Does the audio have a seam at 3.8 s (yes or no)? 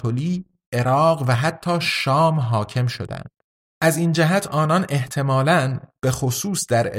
yes